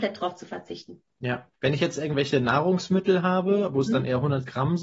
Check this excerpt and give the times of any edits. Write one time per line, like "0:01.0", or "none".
0:01.5